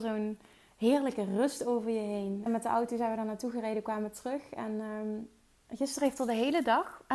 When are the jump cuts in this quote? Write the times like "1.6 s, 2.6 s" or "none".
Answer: 2.5 s